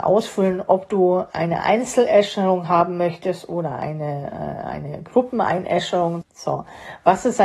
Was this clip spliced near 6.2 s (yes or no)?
yes